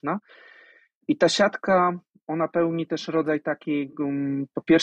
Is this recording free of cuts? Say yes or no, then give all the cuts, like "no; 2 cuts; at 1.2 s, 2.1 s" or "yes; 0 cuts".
yes; 0 cuts